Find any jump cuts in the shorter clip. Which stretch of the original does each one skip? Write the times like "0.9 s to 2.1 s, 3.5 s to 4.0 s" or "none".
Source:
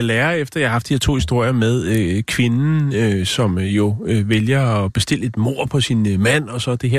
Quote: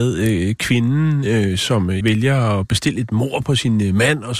3.7 s to 4.3 s